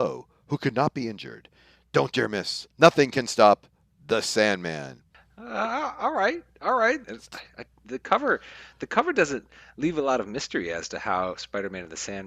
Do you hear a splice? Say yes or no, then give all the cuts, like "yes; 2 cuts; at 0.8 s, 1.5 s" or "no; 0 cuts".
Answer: yes; 2 cuts; at 2.7 s, 7.0 s